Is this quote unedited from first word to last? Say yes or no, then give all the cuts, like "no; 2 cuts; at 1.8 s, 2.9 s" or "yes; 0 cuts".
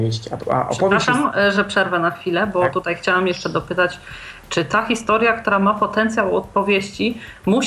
yes; 0 cuts